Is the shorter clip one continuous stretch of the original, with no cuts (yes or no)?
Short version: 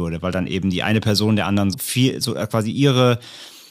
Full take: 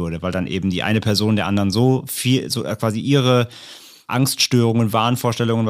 no